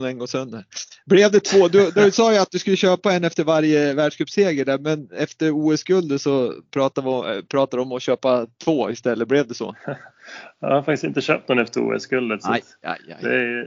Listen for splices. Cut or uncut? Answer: uncut